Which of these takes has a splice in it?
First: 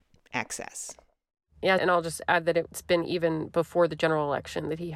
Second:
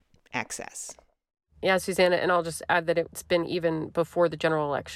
first; 1 cut; at 1.8 s

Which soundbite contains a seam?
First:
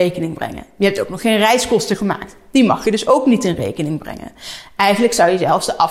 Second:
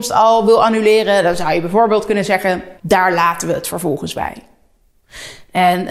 second; 1 cut; at 2.8 s

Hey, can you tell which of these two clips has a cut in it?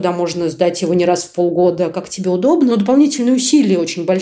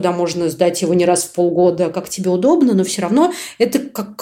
first; 1 cut; at 2.7 s

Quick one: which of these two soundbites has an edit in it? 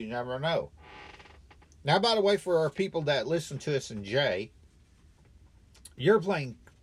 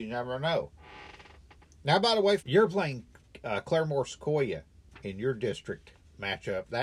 second; 1 cut; at 2.4 s

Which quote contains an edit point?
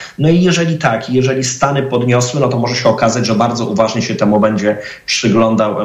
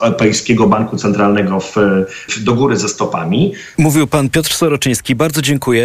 second; 2 cuts; at 2.3 s, 3.7 s

